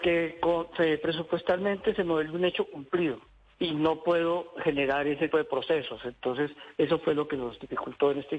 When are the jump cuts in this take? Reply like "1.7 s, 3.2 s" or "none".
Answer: 5.3 s